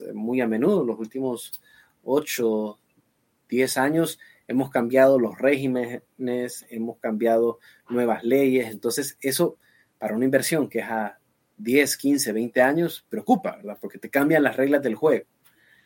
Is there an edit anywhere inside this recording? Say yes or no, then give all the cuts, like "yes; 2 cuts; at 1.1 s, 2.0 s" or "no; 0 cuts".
no; 0 cuts